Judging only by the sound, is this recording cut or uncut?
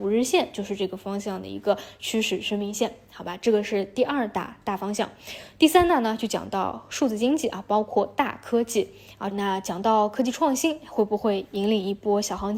cut